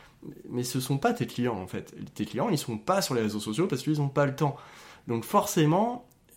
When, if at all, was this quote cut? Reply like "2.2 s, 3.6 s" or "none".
none